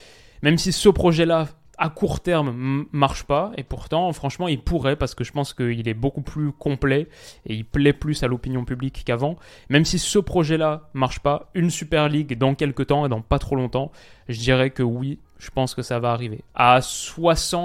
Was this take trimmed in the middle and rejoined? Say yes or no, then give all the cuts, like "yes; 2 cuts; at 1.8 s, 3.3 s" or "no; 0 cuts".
no; 0 cuts